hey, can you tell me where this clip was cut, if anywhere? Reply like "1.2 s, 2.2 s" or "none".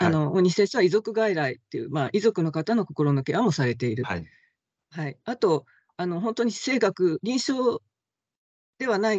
none